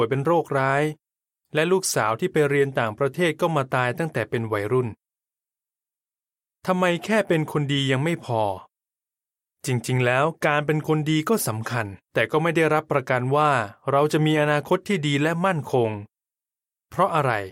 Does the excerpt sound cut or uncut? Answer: uncut